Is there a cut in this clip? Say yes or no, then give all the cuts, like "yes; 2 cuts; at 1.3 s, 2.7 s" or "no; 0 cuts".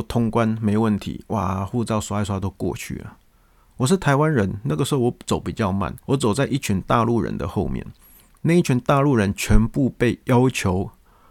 yes; 1 cut; at 6.0 s